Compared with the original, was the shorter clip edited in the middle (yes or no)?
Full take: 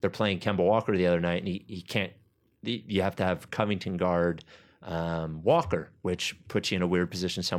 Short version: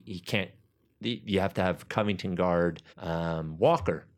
yes